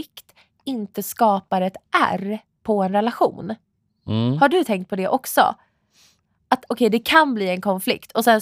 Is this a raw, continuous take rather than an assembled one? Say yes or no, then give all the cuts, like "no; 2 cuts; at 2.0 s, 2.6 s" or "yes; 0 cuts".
no; 1 cut; at 6.6 s